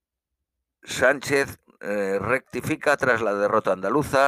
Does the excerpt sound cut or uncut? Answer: uncut